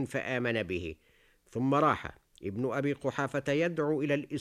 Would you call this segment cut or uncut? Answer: uncut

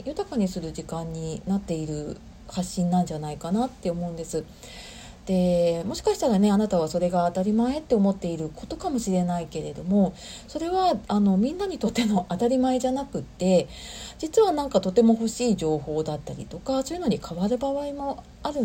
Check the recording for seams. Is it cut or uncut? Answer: uncut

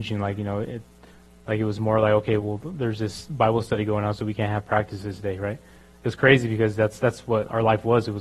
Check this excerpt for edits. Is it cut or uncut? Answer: uncut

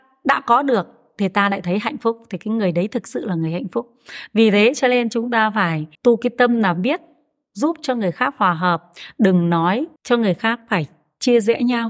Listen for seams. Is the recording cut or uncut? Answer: cut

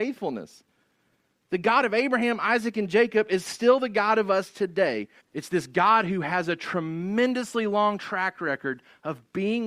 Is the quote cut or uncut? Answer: cut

